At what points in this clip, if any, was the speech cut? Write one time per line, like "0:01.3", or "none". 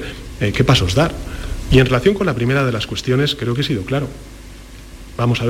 0:01.7